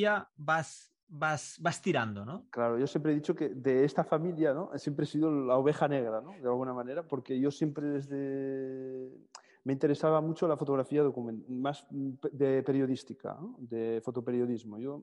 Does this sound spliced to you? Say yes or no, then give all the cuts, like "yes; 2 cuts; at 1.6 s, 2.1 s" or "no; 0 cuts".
no; 0 cuts